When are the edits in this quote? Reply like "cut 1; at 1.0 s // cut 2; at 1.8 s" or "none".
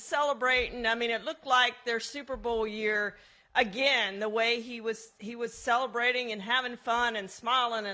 none